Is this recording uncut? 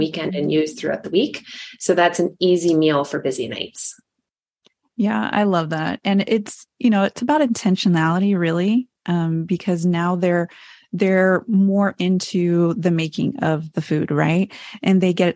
yes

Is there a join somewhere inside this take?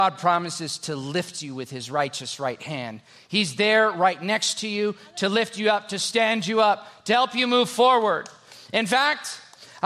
no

